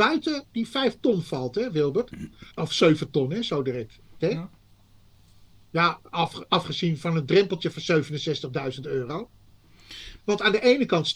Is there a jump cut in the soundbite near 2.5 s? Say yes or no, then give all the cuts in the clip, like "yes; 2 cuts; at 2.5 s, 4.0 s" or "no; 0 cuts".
yes; 3 cuts; at 2.5 s, 4.2 s, 10.2 s